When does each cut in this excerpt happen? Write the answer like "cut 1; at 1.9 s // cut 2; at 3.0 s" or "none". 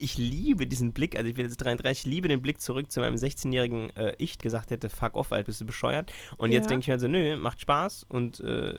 cut 1; at 4.4 s // cut 2; at 5.5 s